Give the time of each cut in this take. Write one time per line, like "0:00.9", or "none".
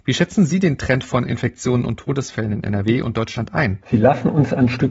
0:03.8